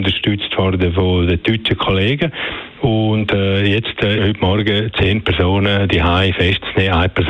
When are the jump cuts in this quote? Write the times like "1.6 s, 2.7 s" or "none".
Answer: 4.2 s